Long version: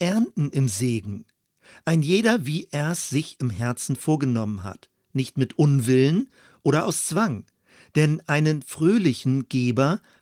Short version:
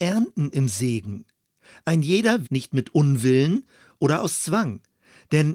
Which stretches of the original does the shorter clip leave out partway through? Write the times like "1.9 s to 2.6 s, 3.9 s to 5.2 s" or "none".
2.4 s to 5.1 s